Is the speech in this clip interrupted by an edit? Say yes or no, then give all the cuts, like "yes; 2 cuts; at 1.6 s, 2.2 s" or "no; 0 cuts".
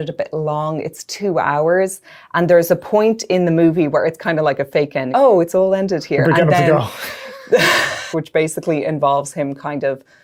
yes; 2 cuts; at 5.1 s, 8.1 s